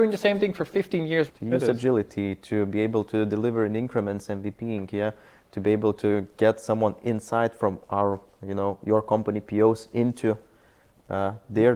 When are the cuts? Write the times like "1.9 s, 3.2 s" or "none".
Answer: 1.3 s